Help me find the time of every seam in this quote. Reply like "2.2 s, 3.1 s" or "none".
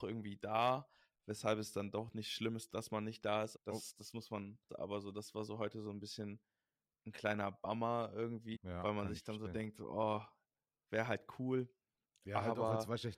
3.5 s, 4.7 s, 8.5 s